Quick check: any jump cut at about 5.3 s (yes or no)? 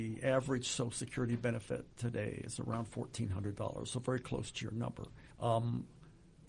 yes